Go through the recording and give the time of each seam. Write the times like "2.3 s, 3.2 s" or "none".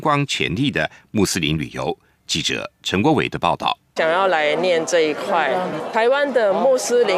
4.0 s, 5.9 s